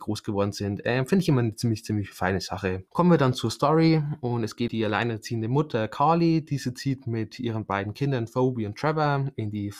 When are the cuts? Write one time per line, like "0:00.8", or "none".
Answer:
0:02.9
0:04.7